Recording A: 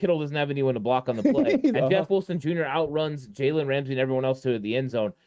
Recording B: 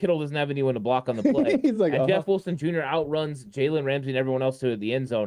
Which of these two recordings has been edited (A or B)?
A